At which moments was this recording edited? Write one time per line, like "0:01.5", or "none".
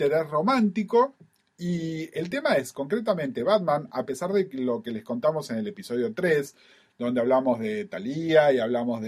none